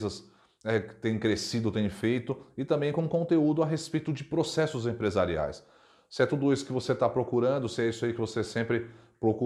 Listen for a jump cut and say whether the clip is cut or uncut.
uncut